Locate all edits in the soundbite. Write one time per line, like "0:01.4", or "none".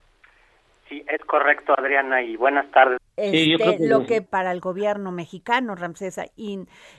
0:03.0
0:04.3